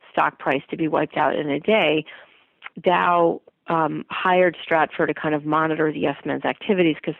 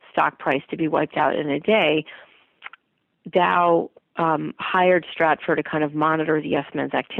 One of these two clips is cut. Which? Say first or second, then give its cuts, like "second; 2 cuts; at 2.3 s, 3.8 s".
first; 1 cut; at 2.7 s